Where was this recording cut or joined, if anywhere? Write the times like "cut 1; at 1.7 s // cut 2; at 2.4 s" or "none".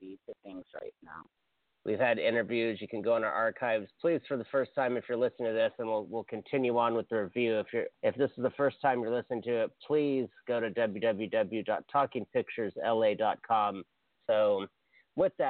cut 1; at 1.7 s // cut 2; at 7.9 s // cut 3; at 14.2 s